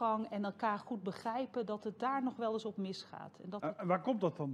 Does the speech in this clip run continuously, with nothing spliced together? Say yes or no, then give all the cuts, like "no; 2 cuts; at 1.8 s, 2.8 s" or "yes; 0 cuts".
yes; 0 cuts